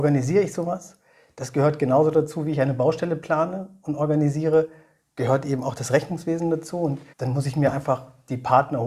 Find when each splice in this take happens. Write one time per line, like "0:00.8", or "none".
0:07.1

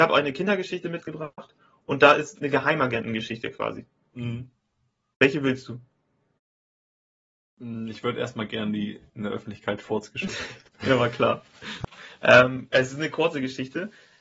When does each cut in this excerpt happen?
0:02.4
0:12.7

